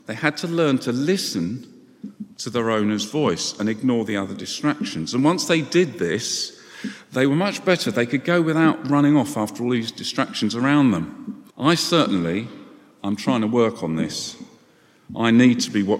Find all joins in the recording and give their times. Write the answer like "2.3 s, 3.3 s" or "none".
11.5 s